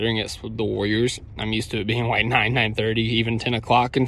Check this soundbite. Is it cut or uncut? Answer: uncut